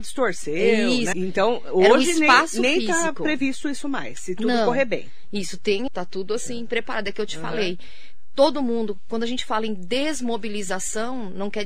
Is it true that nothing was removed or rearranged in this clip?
no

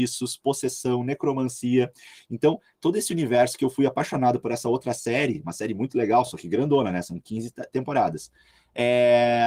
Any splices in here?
no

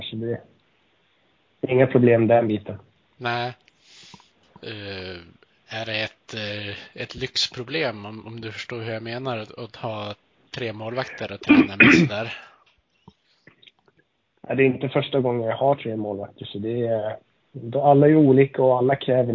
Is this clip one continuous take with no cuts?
yes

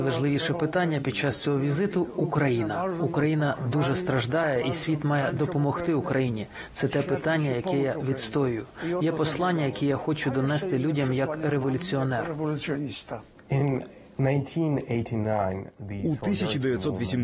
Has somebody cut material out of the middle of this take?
yes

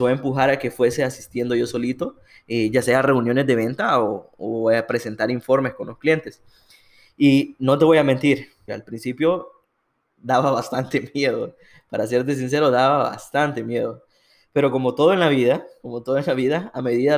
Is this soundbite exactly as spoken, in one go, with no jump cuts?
no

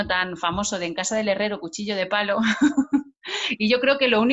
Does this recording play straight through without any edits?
yes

